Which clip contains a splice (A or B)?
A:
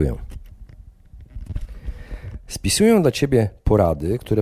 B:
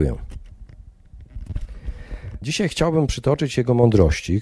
B